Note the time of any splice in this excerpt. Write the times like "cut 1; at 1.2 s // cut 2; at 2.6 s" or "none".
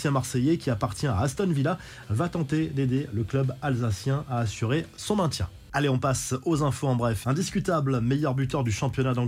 cut 1; at 7.2 s

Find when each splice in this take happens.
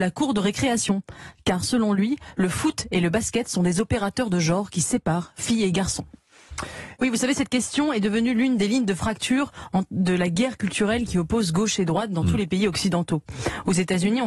cut 1; at 7.0 s

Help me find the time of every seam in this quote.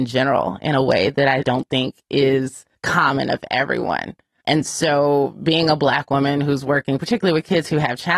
cut 1; at 2.7 s

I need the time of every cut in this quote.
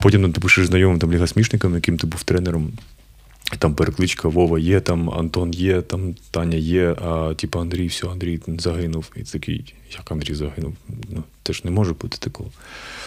none

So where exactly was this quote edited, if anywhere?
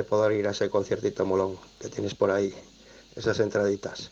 none

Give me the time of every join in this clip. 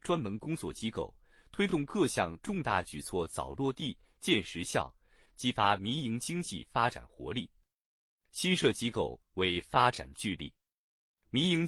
cut 1; at 5.3 s

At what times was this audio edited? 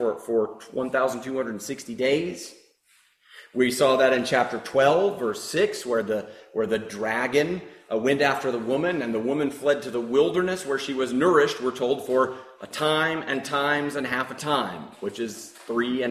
none

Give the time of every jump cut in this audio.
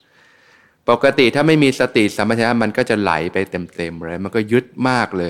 none

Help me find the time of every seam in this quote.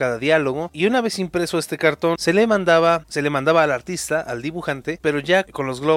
cut 1; at 2.1 s // cut 2; at 5.0 s

